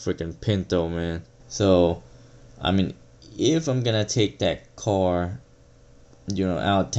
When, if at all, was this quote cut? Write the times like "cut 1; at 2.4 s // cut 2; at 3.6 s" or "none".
cut 1; at 1.4 s